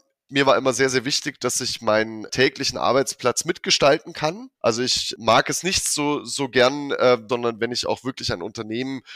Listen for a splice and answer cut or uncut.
cut